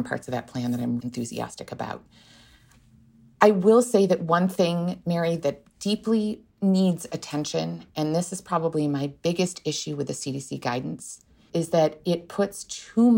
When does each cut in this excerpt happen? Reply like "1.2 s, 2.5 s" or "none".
1.0 s, 6.5 s

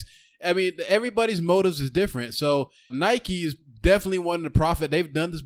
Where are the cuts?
2.9 s

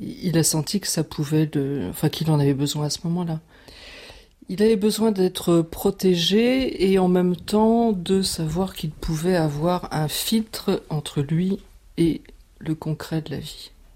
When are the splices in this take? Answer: none

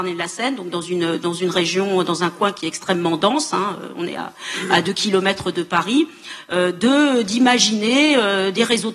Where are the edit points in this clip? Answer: none

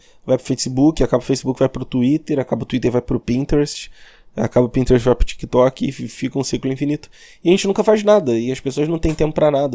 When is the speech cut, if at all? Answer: none

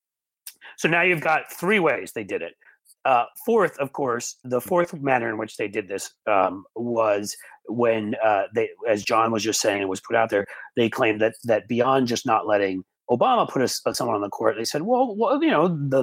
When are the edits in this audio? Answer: 4.4 s

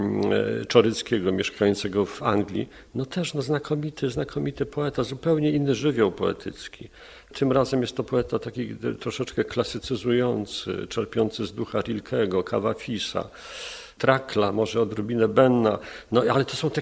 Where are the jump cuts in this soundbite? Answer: none

